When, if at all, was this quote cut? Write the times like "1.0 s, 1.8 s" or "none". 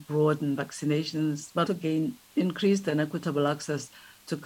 1.7 s